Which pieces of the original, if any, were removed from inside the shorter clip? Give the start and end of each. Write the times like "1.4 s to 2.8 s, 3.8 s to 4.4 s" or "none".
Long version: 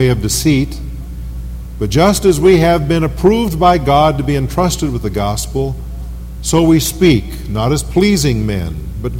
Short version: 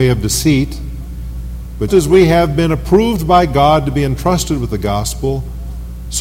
1.9 s to 2.2 s